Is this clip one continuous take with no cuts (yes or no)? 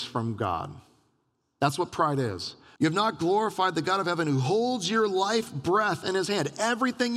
no